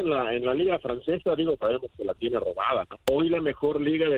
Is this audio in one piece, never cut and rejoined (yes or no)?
no